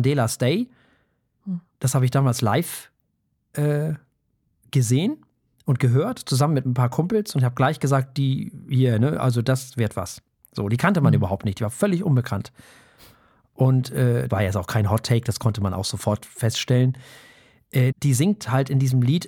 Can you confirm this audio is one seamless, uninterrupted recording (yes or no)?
no